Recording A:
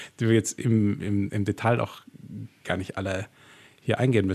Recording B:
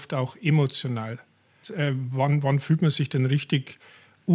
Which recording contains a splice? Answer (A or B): B